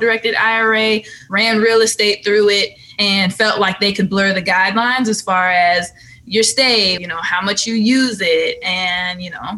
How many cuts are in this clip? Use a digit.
1